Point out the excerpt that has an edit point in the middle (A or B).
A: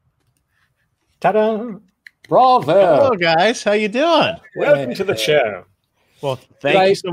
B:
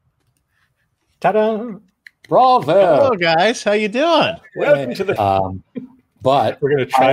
B